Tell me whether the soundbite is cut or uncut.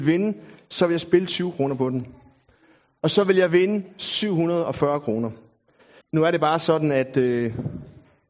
cut